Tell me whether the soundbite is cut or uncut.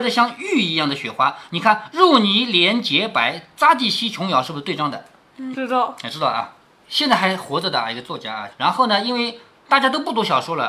cut